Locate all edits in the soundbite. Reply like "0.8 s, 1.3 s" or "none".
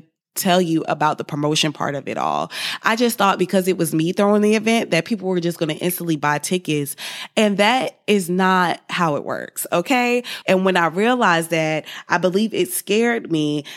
10.4 s